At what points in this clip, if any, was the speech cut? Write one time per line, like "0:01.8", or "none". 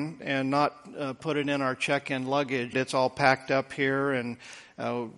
0:02.7